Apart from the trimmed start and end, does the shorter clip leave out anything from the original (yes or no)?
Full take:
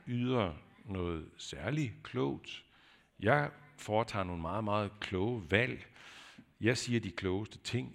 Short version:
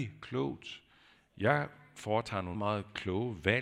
yes